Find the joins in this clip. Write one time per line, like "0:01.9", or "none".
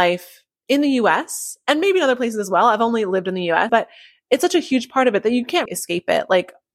0:03.7
0:05.7